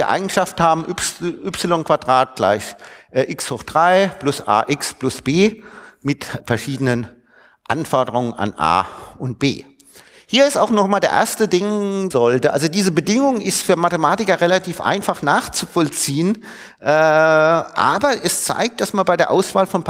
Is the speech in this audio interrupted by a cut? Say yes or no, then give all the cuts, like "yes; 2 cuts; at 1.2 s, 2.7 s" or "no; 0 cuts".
yes; 2 cuts; at 6.4 s, 12.1 s